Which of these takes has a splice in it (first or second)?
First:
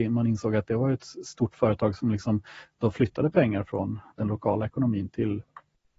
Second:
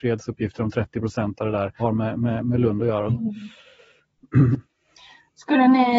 second